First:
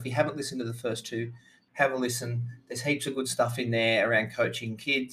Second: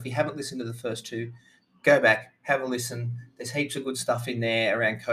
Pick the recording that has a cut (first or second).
first